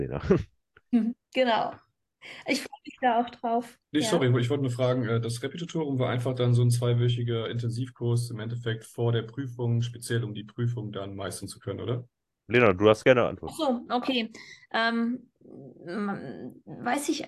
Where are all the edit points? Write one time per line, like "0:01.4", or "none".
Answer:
0:03.8